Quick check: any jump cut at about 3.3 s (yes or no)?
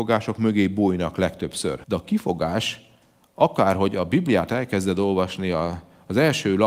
no